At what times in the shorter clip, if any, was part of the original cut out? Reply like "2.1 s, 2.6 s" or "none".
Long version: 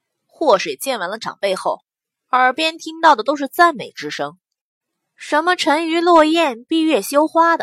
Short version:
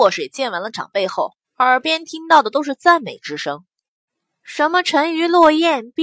1.4 s